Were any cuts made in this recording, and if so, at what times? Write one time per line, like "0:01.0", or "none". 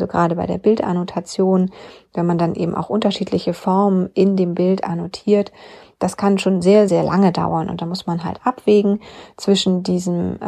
0:06.9